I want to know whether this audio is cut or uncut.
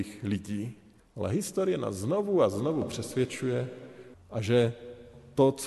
cut